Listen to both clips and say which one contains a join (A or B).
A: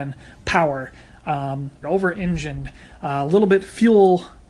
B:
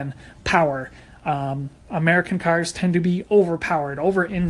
A